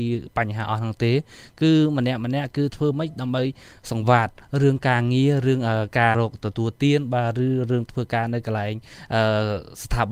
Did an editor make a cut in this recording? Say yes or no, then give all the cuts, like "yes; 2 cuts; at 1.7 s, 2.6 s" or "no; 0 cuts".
yes; 1 cut; at 6.1 s